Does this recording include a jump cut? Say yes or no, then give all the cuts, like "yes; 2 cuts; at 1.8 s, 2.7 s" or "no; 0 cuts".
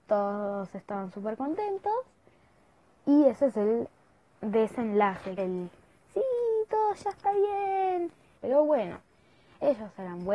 yes; 2 cuts; at 5.4 s, 8.4 s